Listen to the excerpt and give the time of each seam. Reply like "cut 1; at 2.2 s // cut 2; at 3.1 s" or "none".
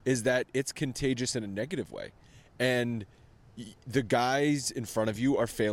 none